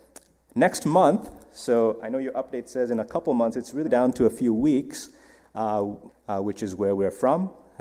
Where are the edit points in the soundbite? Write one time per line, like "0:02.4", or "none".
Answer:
0:03.9
0:06.1